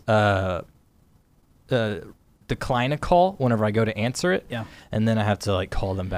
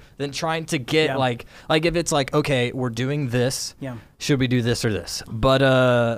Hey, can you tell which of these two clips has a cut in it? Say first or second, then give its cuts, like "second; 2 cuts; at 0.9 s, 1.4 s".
second; 1 cut; at 5.3 s